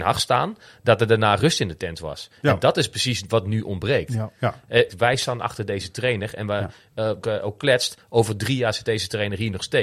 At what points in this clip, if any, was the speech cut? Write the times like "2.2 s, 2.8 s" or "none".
4.9 s, 7.2 s